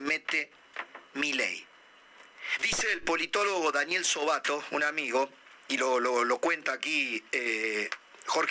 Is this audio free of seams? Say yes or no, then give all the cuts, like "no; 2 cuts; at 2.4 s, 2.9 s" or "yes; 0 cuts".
no; 1 cut; at 2.6 s